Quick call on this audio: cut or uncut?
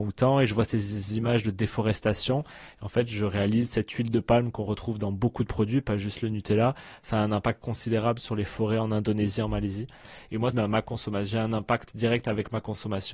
cut